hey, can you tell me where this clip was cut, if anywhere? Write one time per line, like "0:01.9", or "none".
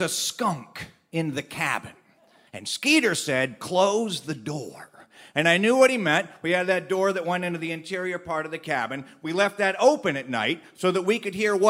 0:02.5